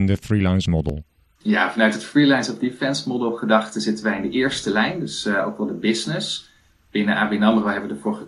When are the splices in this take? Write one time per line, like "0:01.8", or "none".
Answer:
none